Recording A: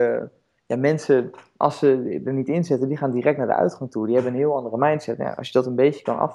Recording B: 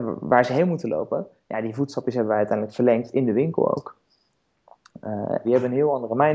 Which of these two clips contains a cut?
B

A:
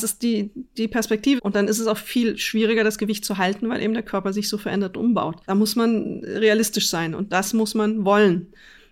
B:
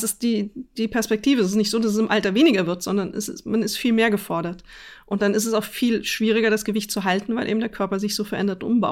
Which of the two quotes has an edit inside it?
A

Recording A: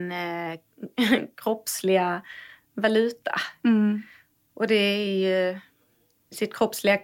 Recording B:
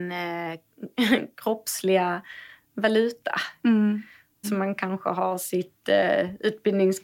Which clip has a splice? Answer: B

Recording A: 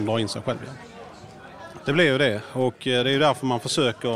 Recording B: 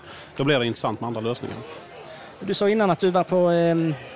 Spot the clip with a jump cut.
A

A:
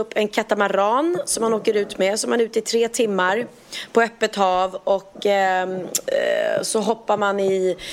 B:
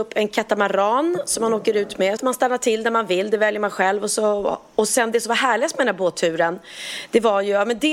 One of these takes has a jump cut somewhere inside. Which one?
B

